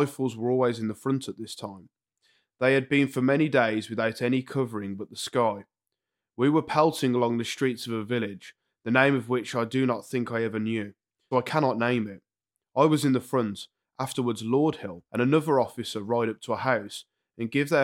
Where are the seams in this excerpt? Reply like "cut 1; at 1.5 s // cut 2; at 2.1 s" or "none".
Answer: cut 1; at 11.3 s // cut 2; at 13.8 s // cut 3; at 15.1 s